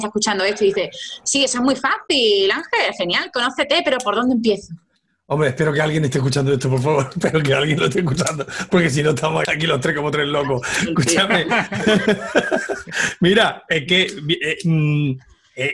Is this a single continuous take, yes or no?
no